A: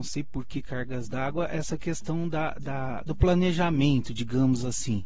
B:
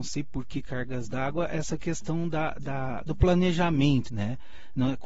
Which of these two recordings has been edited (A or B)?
B